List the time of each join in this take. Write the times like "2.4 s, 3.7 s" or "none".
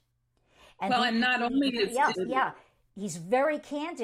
2.1 s